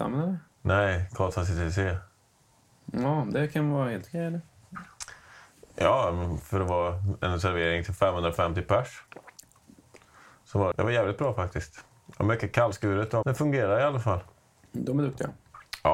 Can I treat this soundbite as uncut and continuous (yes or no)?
no